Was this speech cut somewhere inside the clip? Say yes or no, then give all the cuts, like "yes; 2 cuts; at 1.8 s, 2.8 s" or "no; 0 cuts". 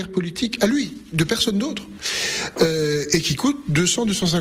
no; 0 cuts